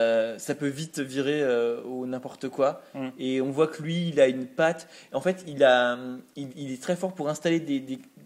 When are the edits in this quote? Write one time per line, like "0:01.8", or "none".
none